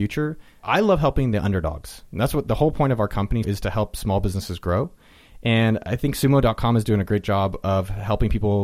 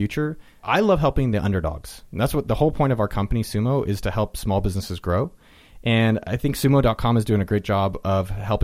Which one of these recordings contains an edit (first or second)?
first